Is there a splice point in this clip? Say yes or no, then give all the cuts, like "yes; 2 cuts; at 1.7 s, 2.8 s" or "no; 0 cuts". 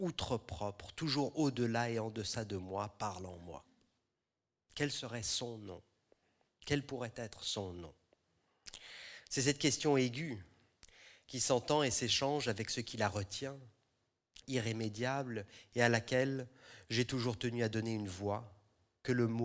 yes; 1 cut; at 14.4 s